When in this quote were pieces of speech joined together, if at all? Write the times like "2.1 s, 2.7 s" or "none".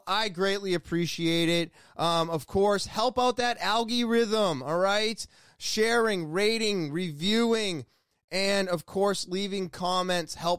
none